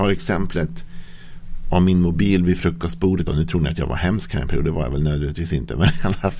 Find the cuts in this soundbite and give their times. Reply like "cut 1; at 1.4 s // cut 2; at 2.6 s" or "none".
none